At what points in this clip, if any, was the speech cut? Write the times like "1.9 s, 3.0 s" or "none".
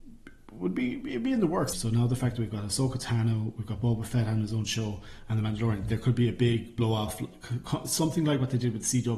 1.7 s